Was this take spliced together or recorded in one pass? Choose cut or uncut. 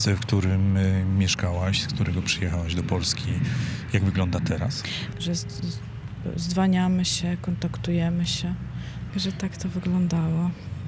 cut